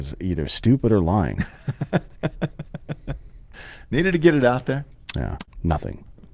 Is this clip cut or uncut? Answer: cut